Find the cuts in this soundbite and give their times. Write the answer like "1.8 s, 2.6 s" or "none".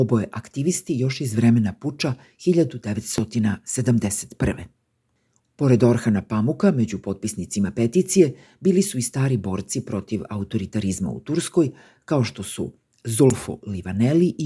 5.4 s